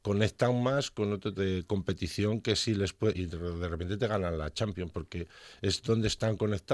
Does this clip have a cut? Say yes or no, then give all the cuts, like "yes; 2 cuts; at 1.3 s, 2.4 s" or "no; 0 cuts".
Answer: yes; 2 cuts; at 1.4 s, 3.1 s